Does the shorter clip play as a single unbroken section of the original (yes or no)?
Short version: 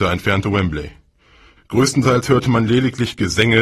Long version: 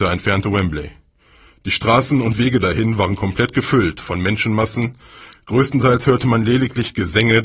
no